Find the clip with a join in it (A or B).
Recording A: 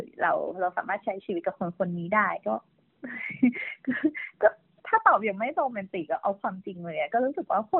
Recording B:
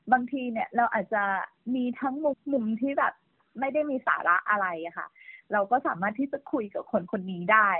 B